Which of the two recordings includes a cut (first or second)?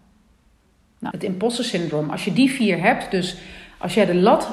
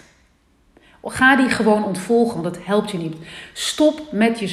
first